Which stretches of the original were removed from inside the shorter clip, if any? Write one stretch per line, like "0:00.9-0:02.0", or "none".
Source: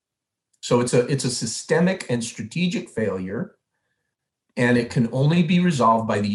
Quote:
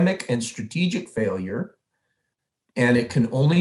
none